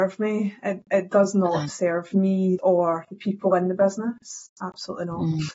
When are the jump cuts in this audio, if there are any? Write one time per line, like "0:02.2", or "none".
0:02.6